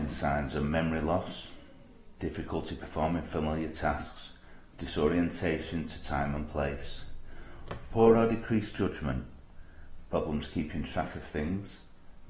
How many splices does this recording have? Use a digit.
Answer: 1